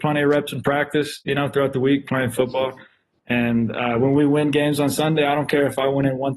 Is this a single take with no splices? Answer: yes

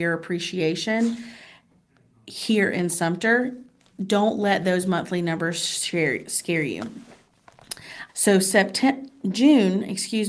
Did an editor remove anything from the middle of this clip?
yes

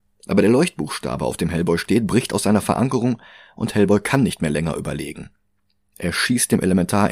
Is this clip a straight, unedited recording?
yes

